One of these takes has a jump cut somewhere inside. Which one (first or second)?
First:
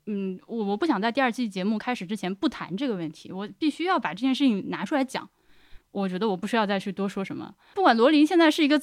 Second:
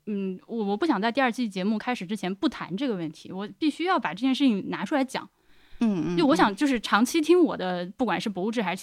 first